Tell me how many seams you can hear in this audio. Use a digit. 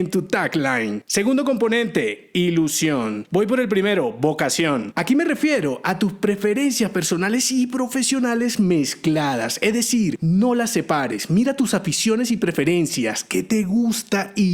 1